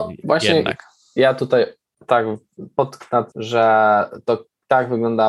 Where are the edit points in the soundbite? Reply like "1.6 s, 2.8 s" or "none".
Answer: 3.3 s